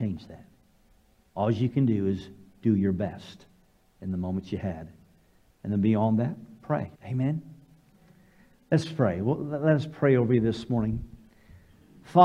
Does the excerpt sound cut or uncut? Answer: cut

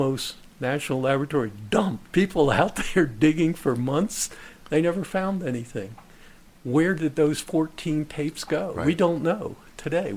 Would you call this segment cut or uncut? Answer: cut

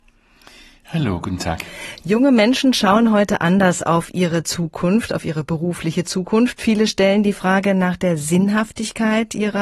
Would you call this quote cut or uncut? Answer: uncut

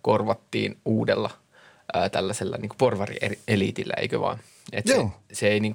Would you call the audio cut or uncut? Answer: uncut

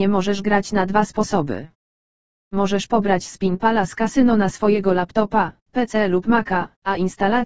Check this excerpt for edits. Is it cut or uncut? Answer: uncut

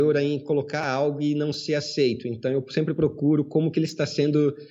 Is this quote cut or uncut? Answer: uncut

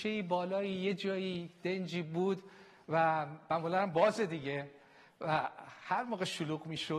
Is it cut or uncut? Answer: uncut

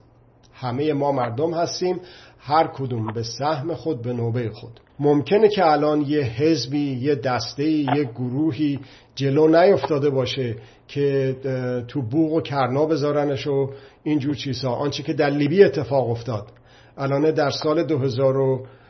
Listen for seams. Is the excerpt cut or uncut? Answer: cut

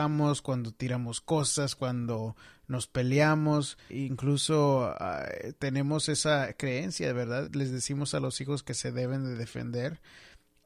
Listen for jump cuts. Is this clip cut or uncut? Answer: cut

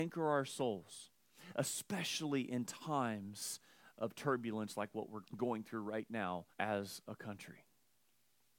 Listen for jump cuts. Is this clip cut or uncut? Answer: cut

